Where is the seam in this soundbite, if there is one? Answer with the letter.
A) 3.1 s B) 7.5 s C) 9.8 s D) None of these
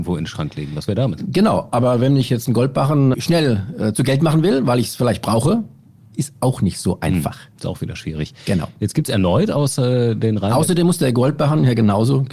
A